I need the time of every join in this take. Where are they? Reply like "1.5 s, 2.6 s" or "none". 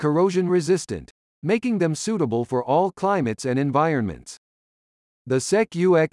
none